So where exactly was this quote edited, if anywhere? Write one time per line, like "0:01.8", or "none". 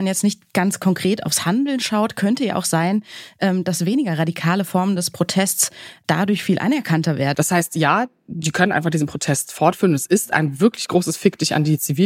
0:07.3